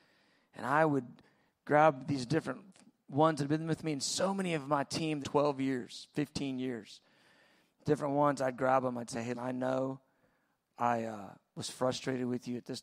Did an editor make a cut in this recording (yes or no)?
yes